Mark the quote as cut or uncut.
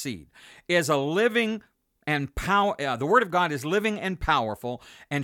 uncut